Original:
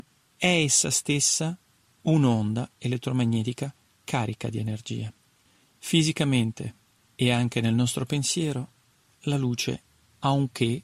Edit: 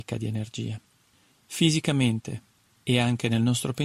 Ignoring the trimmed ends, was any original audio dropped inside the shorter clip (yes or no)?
no